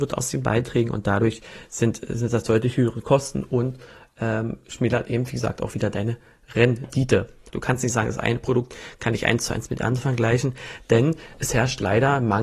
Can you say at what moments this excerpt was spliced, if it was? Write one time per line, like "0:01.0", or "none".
0:07.5